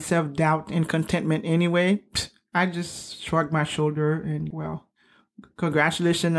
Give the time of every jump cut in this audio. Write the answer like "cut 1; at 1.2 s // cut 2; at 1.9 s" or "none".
cut 1; at 4.5 s